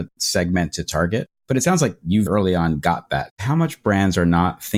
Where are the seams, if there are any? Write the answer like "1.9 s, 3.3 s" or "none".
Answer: 2.3 s, 3.3 s